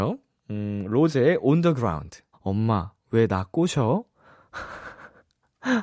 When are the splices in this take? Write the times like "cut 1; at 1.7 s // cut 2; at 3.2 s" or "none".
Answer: cut 1; at 2.3 s